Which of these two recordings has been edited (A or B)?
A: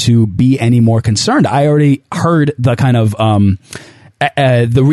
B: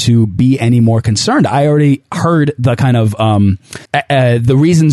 B